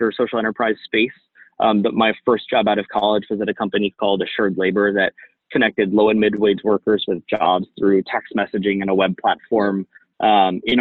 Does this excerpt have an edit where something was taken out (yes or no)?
no